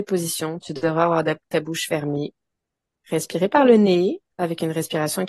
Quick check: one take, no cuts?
yes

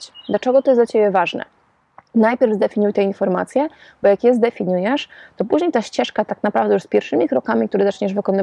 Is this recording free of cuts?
yes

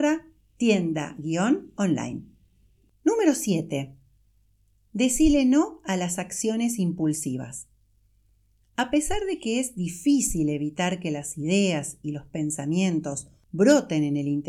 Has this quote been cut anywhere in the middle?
no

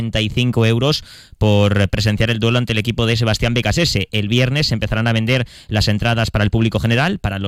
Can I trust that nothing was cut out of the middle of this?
yes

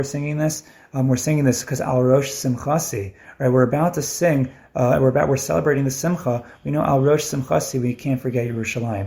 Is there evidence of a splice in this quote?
no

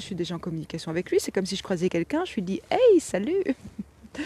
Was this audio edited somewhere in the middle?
no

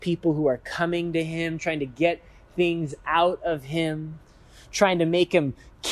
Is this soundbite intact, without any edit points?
no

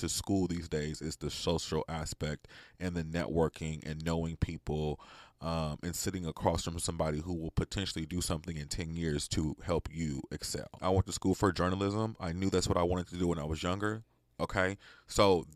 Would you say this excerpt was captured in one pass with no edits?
no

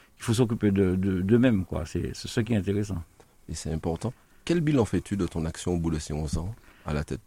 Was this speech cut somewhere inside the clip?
no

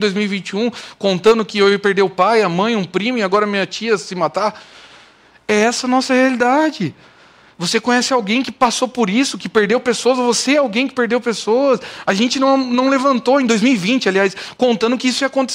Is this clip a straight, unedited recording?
yes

